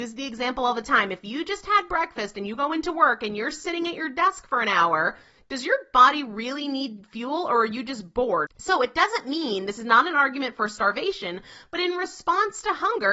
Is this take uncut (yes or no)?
no